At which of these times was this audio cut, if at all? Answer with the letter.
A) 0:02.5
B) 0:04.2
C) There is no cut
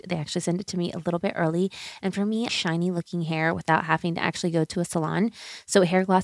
A